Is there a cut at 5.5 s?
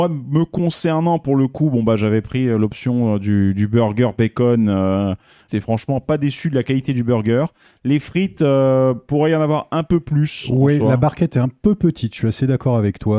yes; 1 cut; at 5.5 s

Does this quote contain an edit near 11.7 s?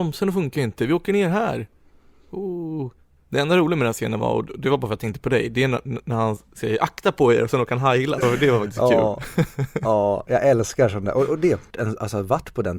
yes; 2 cuts; at 8.2 s, 11.7 s

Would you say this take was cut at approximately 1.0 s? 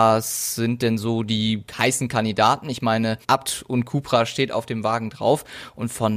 no; 1 cut; at 3.2 s

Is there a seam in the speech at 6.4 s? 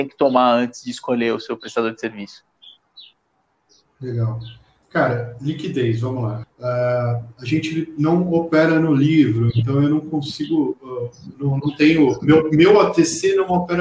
yes; 1 cut; at 6.4 s

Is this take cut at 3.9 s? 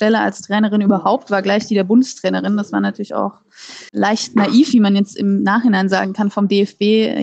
yes; 1 cut; at 3.9 s

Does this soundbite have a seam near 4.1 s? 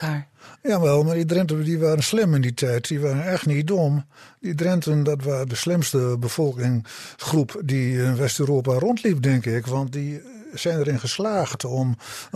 no; 0 cuts

